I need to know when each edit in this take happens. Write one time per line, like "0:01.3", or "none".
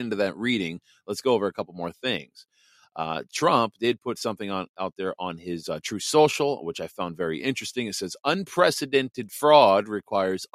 none